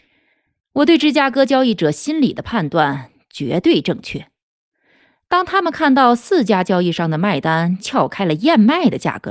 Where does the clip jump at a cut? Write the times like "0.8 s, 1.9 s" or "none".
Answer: none

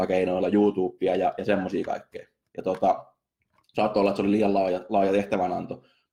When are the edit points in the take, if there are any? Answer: none

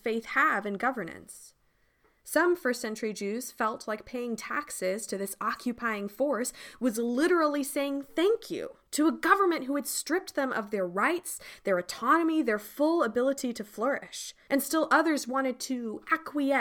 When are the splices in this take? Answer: 14.5 s

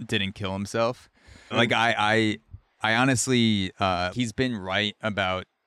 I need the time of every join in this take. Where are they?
1.5 s, 4.1 s

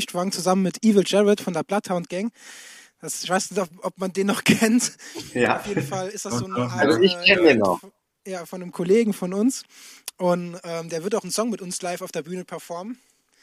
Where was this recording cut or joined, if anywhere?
none

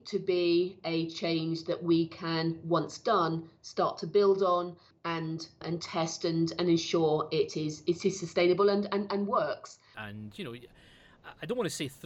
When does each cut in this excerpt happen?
9.9 s

